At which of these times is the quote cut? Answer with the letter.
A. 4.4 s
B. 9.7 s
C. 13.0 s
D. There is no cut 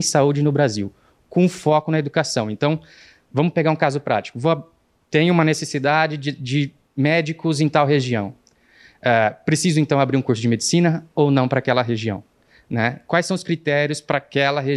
D